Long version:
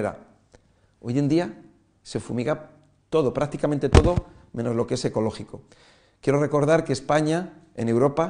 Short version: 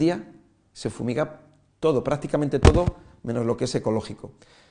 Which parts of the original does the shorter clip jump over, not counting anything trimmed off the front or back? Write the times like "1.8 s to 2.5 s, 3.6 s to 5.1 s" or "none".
none